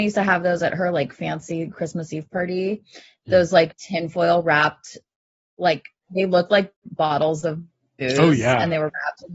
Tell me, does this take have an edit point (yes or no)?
no